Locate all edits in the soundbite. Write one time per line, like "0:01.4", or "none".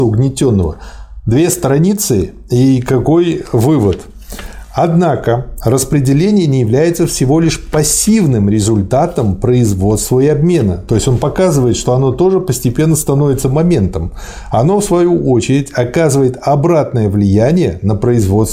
none